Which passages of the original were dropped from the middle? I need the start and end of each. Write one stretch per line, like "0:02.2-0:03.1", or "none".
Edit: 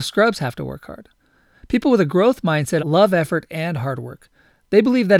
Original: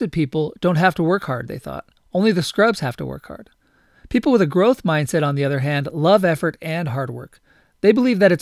0:05.2-0:05.9